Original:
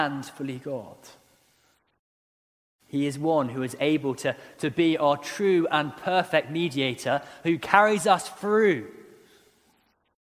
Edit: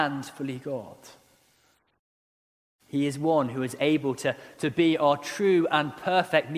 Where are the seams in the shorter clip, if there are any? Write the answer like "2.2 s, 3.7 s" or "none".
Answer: none